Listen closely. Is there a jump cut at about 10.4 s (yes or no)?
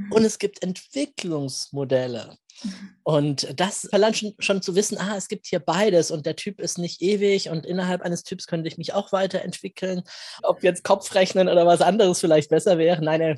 yes